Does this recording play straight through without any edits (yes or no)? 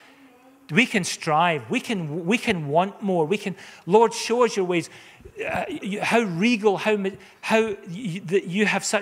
no